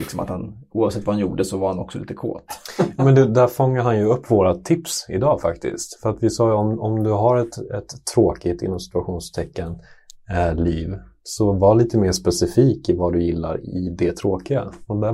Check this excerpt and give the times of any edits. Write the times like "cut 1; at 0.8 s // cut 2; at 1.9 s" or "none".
none

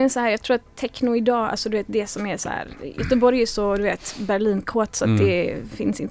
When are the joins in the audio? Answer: none

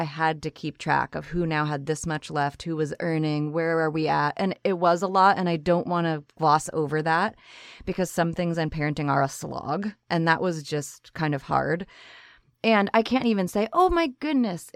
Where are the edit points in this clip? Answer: none

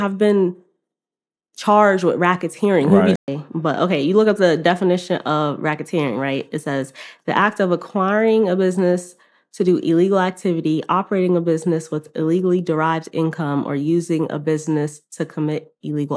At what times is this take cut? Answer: cut 1; at 3.2 s

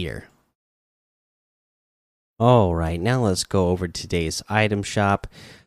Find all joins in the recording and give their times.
none

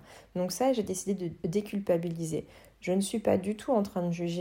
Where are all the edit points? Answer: none

